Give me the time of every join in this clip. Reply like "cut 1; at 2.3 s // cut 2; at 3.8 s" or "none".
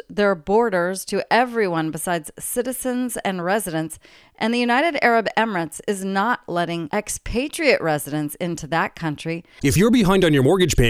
cut 1; at 9.6 s

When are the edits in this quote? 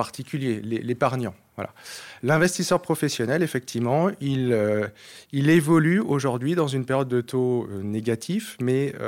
none

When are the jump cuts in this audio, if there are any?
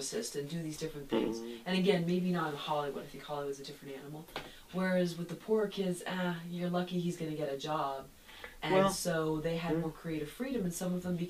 none

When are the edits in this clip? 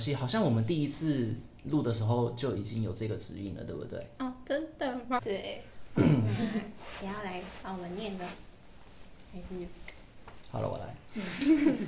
cut 1; at 5.2 s

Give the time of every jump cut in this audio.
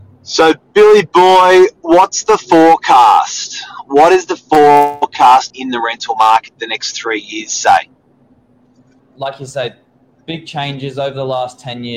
cut 1; at 5.5 s // cut 2; at 9.0 s

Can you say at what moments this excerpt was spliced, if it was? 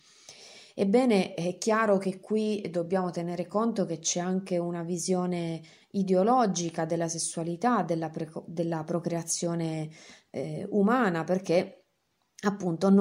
none

